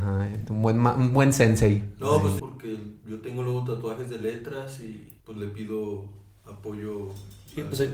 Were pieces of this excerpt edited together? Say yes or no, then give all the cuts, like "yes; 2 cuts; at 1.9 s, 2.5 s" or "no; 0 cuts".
yes; 2 cuts; at 2.4 s, 5.2 s